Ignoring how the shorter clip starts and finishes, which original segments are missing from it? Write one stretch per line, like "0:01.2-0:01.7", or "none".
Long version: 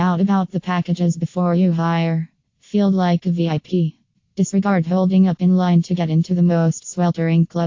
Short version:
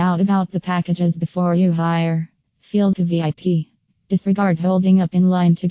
0:02.9-0:03.2